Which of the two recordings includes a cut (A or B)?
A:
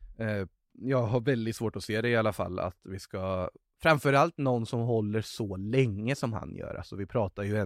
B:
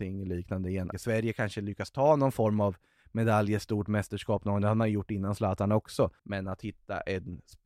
B